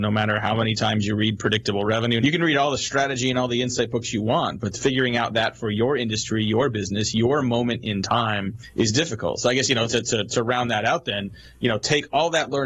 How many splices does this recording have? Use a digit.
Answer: 1